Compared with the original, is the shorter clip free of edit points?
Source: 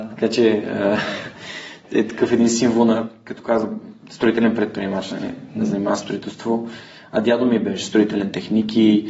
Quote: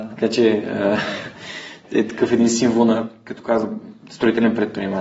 yes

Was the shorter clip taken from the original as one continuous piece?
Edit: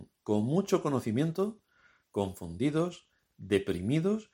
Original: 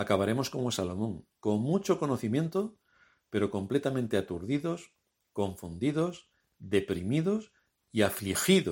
no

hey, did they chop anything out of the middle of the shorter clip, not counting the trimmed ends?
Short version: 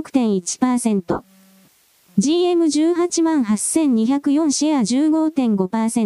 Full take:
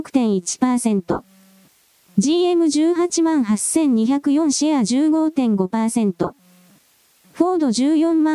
no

